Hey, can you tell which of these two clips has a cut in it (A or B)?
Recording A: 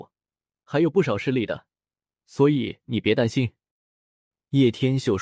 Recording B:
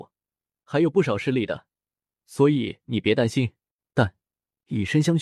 B